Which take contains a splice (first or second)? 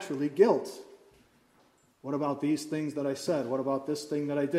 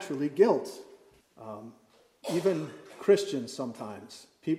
second